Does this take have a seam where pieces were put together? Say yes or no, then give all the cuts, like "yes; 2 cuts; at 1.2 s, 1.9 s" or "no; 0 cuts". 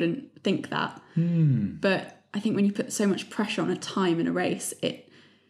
no; 0 cuts